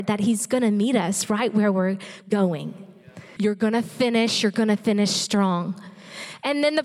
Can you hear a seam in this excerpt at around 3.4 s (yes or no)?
yes